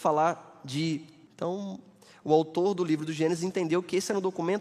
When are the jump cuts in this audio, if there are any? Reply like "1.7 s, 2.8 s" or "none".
1.3 s